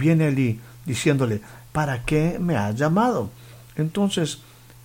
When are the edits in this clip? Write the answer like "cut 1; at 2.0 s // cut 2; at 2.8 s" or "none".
cut 1; at 1.7 s